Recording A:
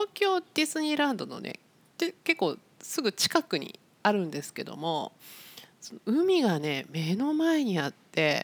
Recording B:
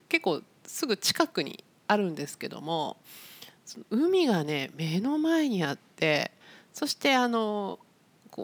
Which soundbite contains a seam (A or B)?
A